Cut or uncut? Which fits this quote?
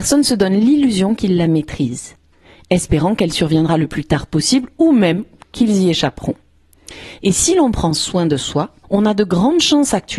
cut